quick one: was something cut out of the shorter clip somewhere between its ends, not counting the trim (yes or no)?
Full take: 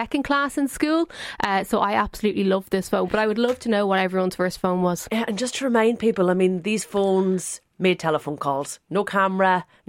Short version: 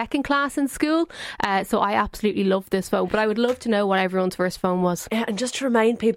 no